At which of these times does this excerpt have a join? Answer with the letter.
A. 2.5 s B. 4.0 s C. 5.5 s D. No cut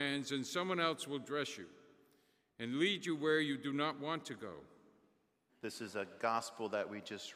C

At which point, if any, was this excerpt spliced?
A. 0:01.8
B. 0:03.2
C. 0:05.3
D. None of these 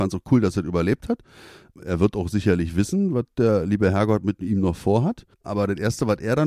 C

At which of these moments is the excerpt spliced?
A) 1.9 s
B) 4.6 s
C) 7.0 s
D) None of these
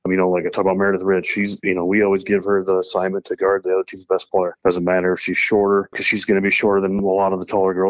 D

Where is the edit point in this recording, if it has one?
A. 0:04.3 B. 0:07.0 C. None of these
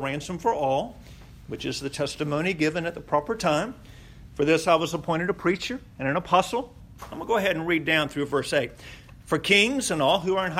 B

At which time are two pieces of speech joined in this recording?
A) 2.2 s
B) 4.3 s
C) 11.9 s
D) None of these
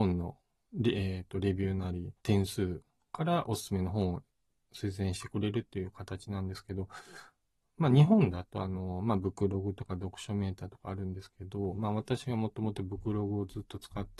A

